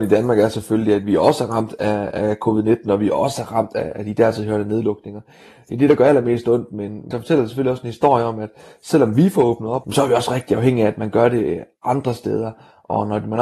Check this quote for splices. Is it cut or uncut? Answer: cut